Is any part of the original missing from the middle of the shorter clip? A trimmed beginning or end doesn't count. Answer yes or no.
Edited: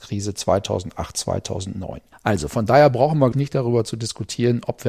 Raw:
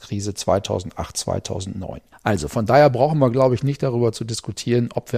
yes